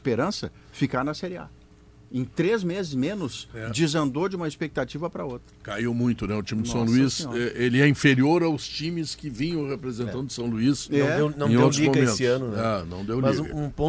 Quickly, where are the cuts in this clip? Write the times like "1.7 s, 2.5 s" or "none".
none